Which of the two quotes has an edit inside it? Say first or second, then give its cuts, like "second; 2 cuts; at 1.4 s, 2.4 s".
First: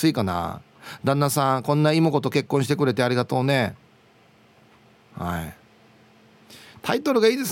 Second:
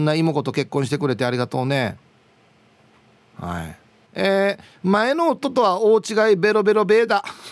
second; 1 cut; at 4.1 s